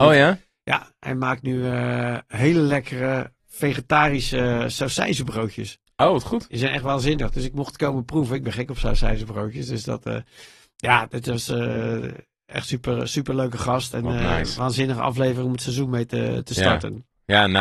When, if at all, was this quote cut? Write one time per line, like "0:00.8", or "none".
none